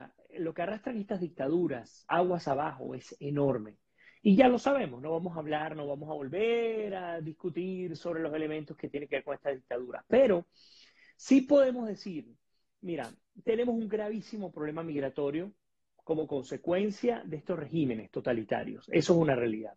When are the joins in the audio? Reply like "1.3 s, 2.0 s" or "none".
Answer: none